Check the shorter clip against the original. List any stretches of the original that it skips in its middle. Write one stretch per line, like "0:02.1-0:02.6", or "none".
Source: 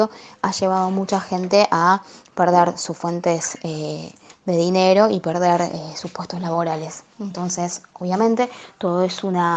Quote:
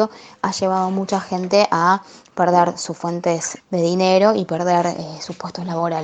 0:03.6-0:04.3